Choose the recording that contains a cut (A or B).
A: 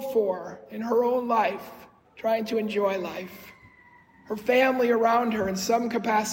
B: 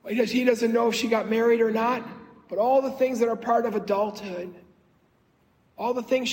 A